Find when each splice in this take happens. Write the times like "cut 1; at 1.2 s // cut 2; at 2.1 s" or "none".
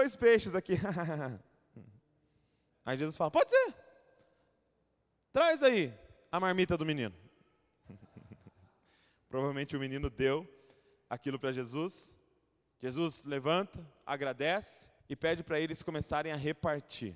cut 1; at 7.8 s // cut 2; at 15.0 s